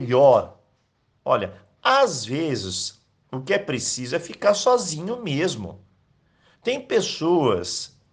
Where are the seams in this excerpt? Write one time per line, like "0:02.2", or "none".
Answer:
none